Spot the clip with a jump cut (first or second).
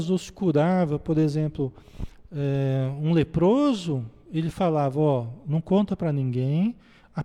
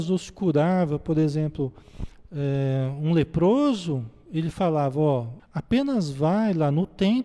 second